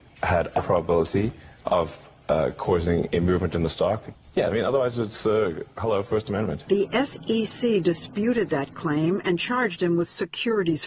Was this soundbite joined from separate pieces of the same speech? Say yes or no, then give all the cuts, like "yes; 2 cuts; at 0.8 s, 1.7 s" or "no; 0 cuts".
yes; 2 cuts; at 4.3 s, 6.7 s